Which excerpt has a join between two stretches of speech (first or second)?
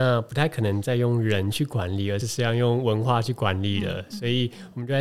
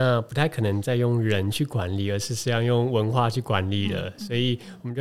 first